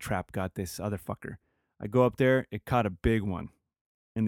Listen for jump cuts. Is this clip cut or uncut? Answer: uncut